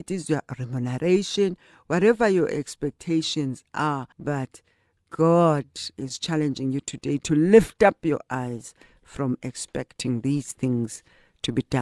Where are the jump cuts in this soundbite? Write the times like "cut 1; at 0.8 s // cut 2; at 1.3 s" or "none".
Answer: cut 1; at 4.1 s